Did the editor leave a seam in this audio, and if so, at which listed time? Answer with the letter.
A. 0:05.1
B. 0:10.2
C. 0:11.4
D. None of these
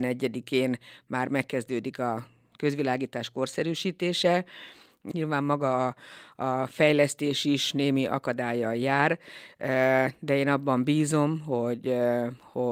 A